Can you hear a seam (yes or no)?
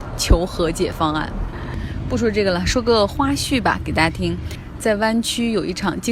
no